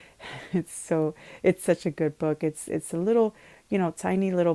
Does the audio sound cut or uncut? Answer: uncut